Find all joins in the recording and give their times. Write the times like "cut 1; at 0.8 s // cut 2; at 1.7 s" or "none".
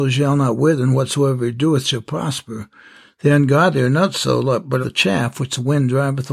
cut 1; at 4.8 s